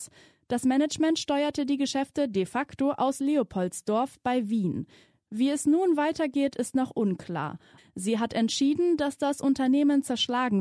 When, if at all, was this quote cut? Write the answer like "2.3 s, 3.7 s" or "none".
7.8 s